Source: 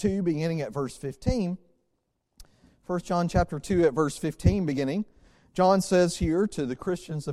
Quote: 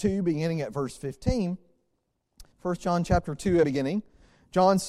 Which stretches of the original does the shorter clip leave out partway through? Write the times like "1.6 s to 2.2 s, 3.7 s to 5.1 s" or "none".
2.5 s to 2.8 s, 3.9 s to 4.7 s